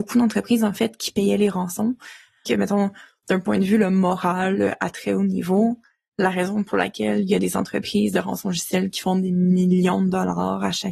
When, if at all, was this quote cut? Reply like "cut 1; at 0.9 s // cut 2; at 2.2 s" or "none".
cut 1; at 2.4 s